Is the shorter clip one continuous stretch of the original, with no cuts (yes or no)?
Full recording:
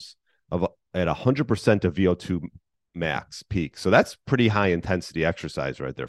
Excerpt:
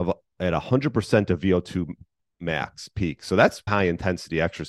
no